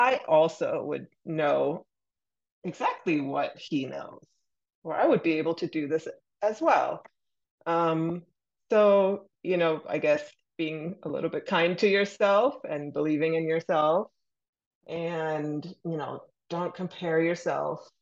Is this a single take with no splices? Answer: yes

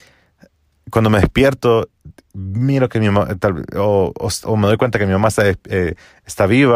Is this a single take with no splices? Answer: yes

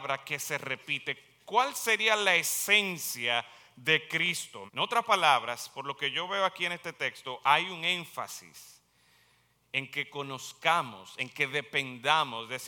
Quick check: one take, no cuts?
no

